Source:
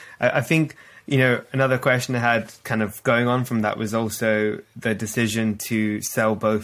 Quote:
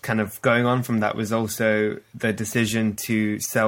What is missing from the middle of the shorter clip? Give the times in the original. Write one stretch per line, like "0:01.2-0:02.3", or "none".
none